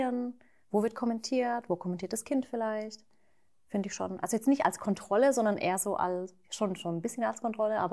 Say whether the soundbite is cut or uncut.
uncut